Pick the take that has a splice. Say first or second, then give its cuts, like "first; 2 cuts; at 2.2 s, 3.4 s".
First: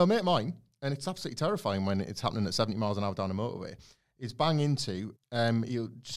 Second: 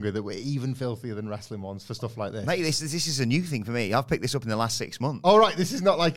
first; 1 cut; at 5.1 s